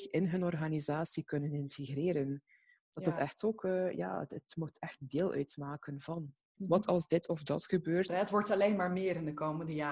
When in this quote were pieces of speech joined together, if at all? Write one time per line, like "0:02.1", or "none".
0:06.5
0:08.1